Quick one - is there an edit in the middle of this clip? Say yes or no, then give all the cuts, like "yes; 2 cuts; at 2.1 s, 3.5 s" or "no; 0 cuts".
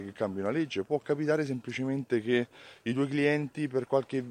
no; 0 cuts